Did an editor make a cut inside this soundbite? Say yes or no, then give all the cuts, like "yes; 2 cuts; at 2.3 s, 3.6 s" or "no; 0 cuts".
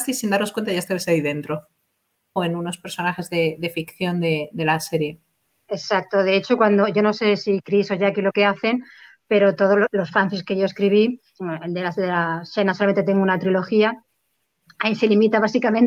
yes; 1 cut; at 2.4 s